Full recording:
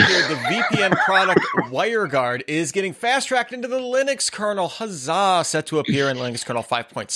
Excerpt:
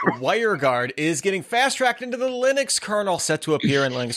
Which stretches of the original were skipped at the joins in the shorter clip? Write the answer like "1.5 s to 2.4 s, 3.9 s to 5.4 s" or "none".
4.7 s to 5.4 s